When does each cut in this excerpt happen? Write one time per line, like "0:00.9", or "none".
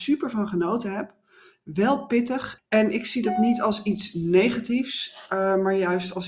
0:02.6